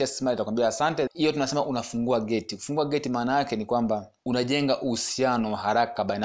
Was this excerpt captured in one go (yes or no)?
no